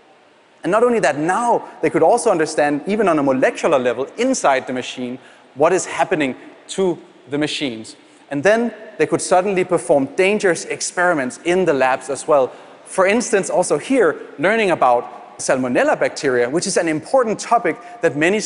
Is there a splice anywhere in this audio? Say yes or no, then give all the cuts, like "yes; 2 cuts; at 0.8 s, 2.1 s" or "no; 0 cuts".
no; 0 cuts